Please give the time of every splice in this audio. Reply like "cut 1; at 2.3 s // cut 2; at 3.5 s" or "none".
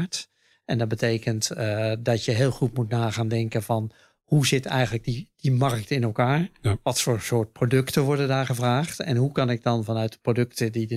none